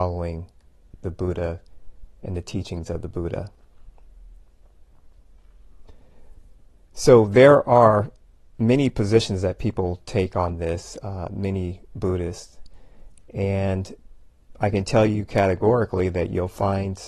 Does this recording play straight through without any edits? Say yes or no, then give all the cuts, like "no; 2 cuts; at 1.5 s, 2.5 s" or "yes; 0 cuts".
yes; 0 cuts